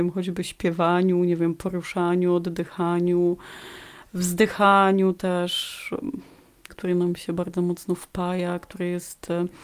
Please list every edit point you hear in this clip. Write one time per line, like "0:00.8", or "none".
0:06.7